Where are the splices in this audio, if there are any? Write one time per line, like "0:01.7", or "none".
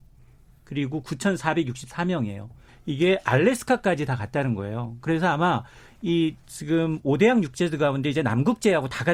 0:02.7